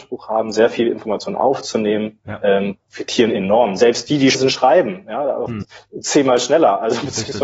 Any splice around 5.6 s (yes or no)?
yes